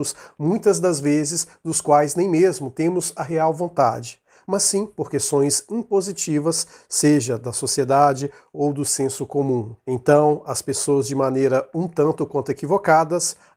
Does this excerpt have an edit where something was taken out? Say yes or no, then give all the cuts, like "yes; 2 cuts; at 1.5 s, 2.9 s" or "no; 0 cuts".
no; 0 cuts